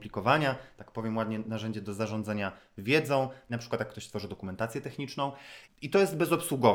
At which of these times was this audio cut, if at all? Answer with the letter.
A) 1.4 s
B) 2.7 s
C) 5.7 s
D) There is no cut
C